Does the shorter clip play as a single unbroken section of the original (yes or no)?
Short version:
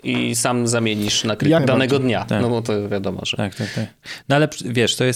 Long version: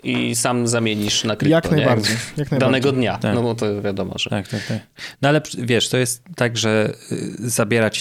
no